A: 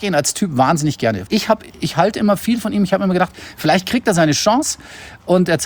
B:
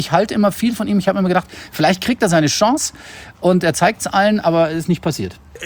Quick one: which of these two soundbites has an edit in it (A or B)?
A